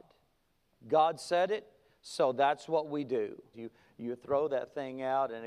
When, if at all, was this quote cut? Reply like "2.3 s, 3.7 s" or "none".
3.5 s